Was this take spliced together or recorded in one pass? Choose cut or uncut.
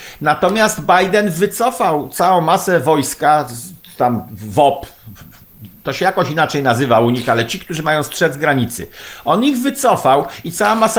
uncut